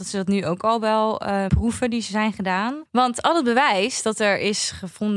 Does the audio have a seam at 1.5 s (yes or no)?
yes